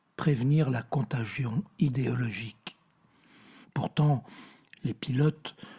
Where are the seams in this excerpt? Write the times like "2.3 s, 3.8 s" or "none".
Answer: 3.6 s